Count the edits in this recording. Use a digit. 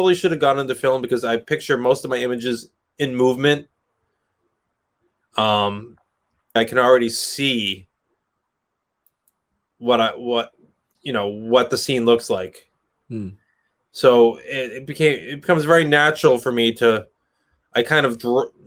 1